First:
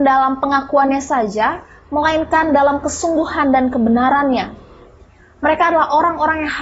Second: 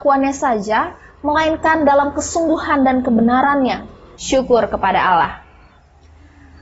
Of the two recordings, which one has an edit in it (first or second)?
second